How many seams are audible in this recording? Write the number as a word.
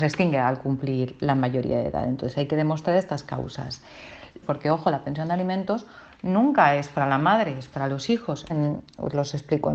two